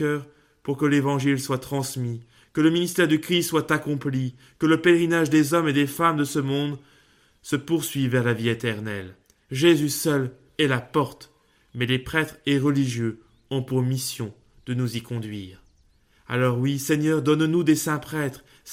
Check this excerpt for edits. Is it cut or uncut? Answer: uncut